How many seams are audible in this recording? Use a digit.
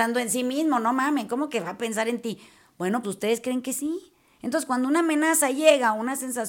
1